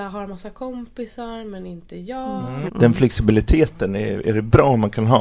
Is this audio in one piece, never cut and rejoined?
no; 1 cut; at 2.7 s

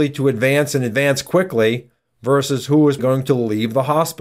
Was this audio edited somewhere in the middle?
yes; 1 cut; at 3.0 s

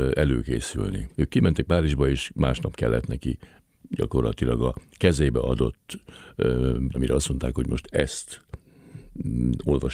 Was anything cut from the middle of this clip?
yes; 2 cuts; at 1.1 s, 6.9 s

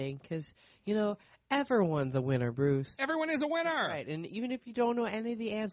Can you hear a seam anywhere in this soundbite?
no; 0 cuts

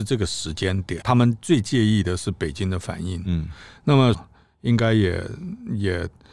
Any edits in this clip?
yes; 2 cuts; at 1.0 s, 4.1 s

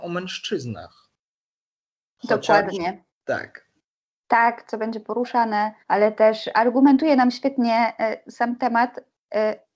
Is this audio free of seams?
no; 2 cuts; at 3.1 s, 5.8 s

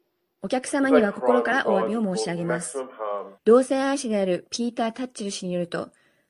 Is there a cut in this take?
yes; 1 cut; at 3.4 s

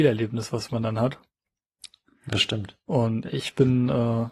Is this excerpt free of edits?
yes; 0 cuts

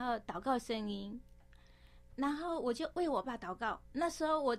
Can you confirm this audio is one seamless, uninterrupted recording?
no; 2 cuts; at 1.4 s, 3.2 s

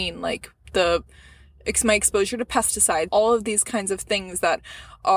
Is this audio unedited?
no; 1 cut; at 3.1 s

